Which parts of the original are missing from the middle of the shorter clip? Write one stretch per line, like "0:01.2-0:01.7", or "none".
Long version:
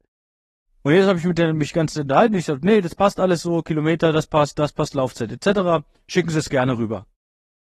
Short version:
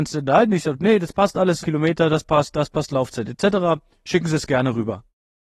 0:03.4-0:03.6